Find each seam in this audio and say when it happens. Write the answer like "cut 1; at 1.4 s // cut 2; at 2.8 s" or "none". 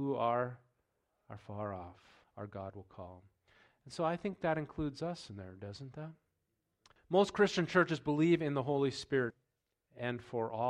cut 1; at 2.2 s // cut 2; at 7.0 s // cut 3; at 9.3 s